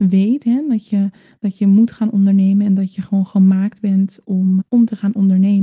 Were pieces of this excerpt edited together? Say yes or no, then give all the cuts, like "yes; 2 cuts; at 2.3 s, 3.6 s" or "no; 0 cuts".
yes; 1 cut; at 4.6 s